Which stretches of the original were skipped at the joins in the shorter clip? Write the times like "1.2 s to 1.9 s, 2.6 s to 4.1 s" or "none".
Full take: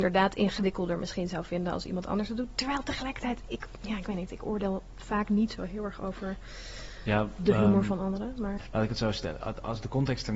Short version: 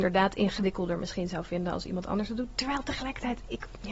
none